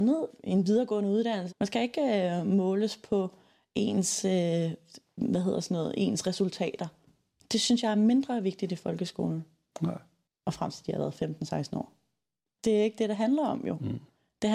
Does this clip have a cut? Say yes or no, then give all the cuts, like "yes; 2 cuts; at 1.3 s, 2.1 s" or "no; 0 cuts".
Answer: yes; 3 cuts; at 1.5 s, 9.7 s, 12.5 s